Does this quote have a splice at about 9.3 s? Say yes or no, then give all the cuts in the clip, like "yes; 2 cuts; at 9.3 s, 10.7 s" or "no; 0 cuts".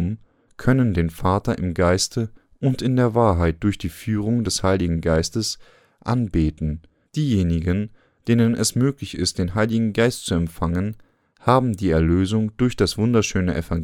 no; 1 cut; at 7.1 s